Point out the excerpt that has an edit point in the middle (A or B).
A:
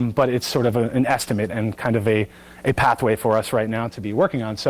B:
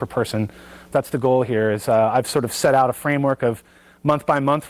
B